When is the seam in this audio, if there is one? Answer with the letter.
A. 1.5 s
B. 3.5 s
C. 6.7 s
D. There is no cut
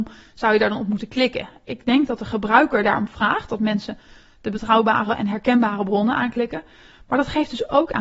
B